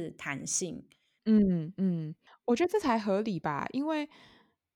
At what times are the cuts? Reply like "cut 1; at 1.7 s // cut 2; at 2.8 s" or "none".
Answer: cut 1; at 1.2 s